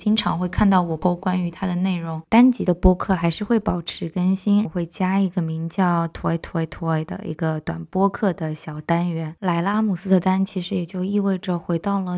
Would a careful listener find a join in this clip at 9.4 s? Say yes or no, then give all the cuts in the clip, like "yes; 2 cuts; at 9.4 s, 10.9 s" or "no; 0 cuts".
no; 2 cuts; at 2.2 s, 4.6 s